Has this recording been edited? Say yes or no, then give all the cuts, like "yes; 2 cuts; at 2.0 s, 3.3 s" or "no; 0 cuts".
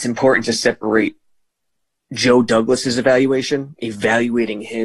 no; 0 cuts